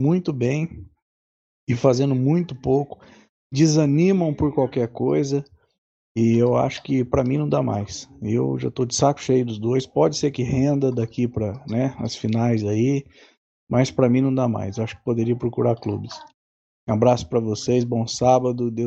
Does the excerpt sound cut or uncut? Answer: uncut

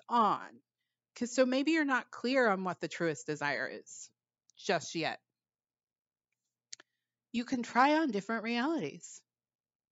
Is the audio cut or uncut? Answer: uncut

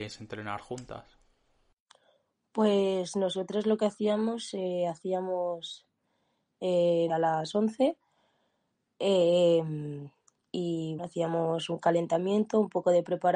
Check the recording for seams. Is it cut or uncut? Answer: cut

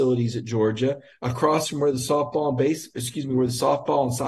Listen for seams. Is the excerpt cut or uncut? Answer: uncut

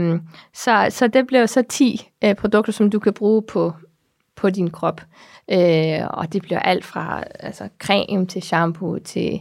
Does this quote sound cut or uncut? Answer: uncut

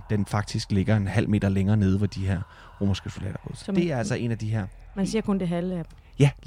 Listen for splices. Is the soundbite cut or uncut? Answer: uncut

